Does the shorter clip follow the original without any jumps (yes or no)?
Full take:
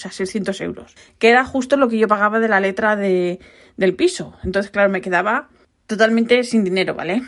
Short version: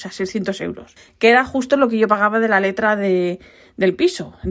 yes